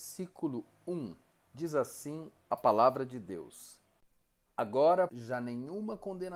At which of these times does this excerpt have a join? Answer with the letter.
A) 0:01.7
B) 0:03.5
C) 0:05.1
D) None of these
C